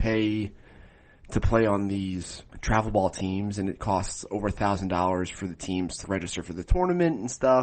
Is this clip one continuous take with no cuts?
no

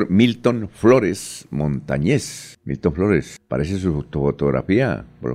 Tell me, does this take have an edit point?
no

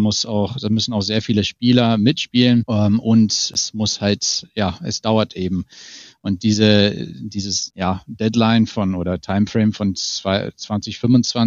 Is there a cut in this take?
no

